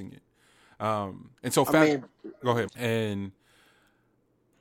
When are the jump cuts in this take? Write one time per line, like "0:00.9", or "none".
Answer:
0:01.4
0:02.7